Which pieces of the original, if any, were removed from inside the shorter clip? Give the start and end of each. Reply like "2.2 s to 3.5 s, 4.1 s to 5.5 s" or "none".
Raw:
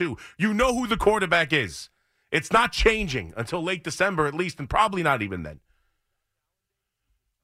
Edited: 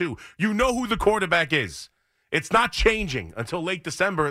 none